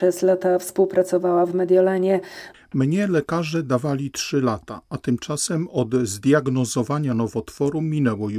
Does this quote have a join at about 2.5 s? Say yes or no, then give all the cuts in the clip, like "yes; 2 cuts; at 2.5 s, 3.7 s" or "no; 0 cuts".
yes; 1 cut; at 2.5 s